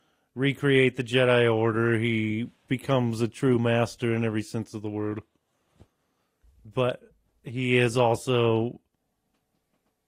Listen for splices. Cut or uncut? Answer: cut